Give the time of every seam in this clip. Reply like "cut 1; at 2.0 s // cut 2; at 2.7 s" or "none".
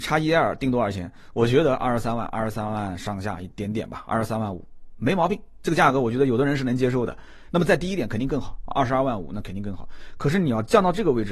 none